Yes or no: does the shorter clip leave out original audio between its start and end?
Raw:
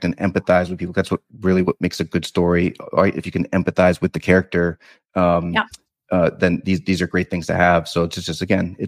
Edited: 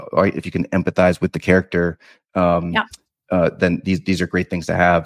no